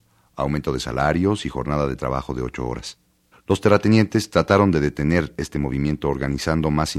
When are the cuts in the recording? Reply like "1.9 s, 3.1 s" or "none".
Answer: 3.3 s